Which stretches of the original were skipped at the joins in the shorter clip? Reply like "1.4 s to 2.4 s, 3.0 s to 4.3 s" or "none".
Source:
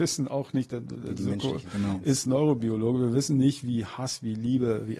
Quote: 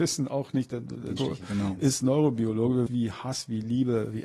1.2 s to 1.4 s, 3.1 s to 3.6 s